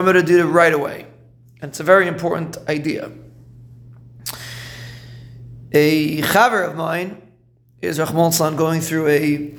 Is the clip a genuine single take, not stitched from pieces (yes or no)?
yes